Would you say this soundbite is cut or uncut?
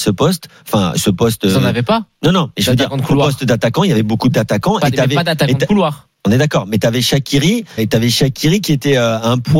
cut